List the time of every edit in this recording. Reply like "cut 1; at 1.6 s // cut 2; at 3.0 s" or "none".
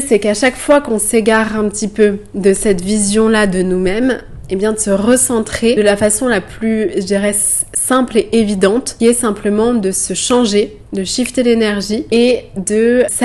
none

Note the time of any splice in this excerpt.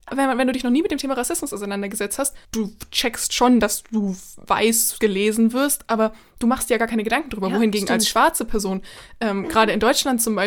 cut 1; at 2.4 s

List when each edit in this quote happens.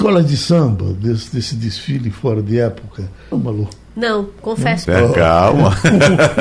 cut 1; at 3.3 s // cut 2; at 4.8 s

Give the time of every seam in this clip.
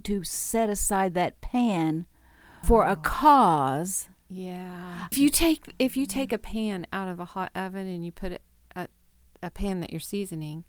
cut 1; at 2.6 s // cut 2; at 5.1 s

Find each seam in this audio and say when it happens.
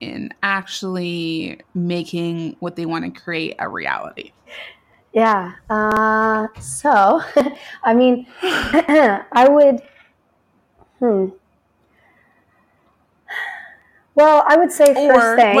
cut 1; at 4.5 s

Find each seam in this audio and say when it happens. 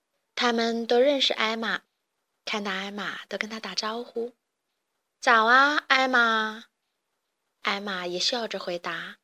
none

